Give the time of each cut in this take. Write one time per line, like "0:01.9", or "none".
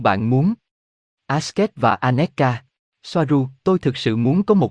0:02.9